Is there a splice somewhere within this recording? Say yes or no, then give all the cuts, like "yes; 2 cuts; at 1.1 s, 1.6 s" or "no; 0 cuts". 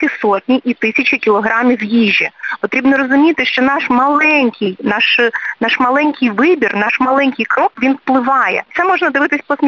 no; 0 cuts